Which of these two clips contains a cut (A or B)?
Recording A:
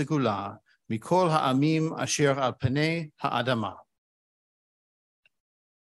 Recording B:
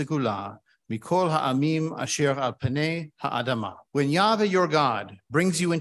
B